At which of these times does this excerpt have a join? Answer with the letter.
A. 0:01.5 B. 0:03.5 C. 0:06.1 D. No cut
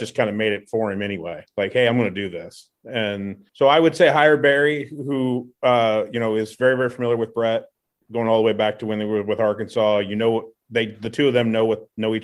B